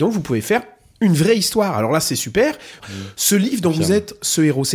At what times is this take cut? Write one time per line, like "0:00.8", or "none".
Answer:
0:02.8